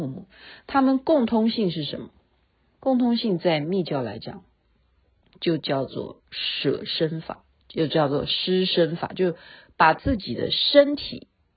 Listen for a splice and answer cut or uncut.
uncut